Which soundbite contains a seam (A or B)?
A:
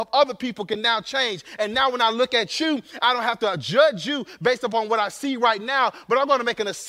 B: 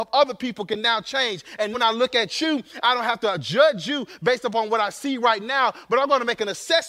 B